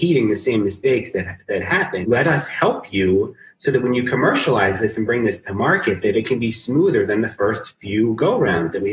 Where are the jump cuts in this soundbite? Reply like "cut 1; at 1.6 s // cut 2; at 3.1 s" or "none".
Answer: cut 1; at 2.0 s

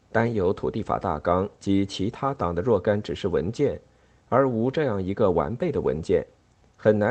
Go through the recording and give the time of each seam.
none

